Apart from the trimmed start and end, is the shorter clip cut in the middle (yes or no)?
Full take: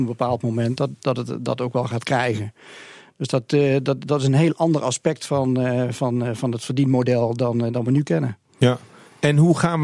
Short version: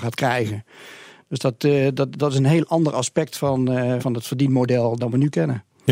yes